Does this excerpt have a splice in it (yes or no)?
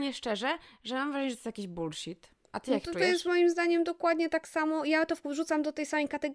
no